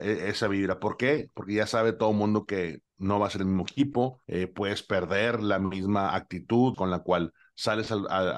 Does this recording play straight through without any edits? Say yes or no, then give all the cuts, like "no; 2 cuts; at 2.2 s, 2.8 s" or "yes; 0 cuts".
no; 2 cuts; at 4.2 s, 6.7 s